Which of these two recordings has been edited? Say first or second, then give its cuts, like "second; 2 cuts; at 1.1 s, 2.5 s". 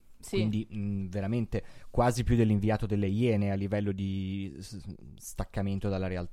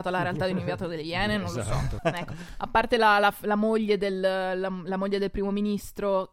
second; 1 cut; at 2.0 s